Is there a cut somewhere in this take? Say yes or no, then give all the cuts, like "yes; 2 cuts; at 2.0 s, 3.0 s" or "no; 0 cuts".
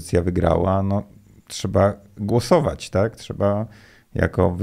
no; 0 cuts